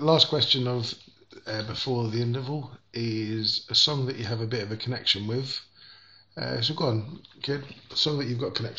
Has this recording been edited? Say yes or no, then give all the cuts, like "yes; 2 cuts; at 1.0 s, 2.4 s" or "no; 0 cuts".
no; 0 cuts